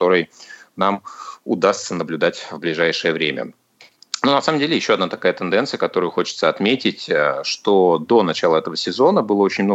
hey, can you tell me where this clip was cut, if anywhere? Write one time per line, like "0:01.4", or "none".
none